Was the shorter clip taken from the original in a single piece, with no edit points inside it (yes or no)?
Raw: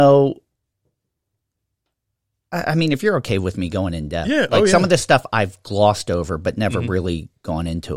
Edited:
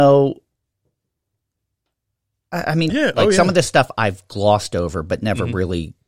no